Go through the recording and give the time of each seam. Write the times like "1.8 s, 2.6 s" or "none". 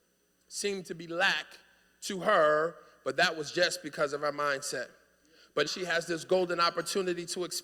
5.7 s

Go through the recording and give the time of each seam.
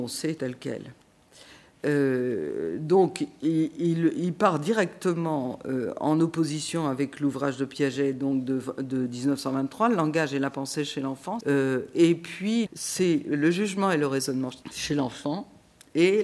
11.4 s, 12.7 s, 14.6 s

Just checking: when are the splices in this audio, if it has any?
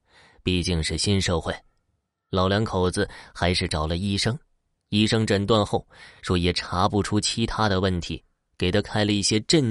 none

